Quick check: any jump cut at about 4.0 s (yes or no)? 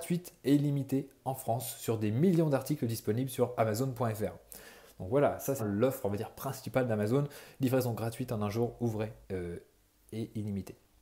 no